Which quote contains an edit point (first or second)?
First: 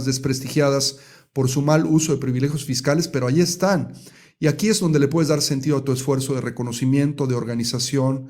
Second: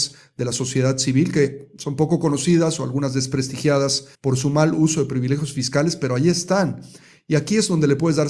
second